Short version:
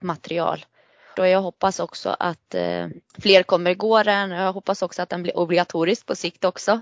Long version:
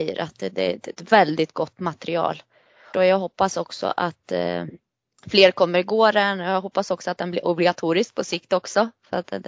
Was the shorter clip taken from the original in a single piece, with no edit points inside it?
no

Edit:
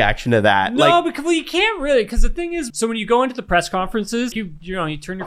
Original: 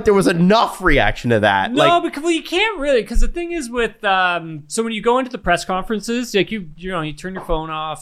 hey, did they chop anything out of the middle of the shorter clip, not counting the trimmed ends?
yes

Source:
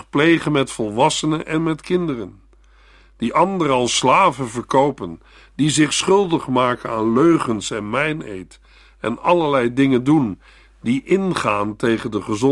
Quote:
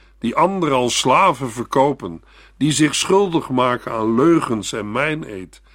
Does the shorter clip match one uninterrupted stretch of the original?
yes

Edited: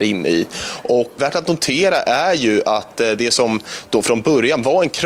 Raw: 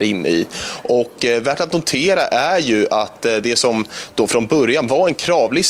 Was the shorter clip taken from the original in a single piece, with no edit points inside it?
no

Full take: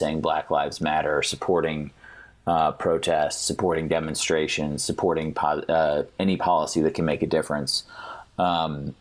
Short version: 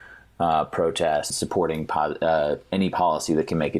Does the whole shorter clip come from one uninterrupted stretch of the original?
no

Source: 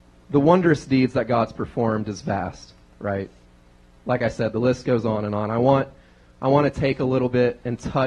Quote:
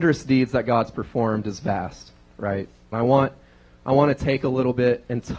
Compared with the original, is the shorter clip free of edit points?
no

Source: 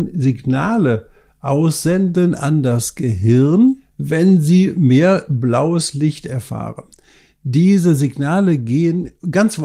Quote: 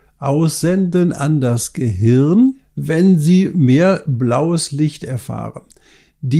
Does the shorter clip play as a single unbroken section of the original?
yes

